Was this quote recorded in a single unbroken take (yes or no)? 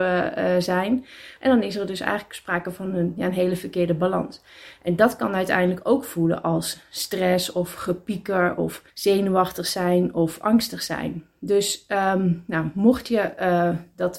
no